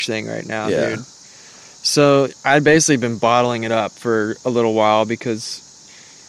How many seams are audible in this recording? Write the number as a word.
zero